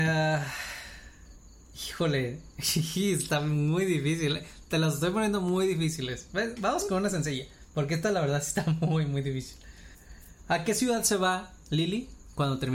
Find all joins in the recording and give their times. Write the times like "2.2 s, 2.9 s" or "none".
none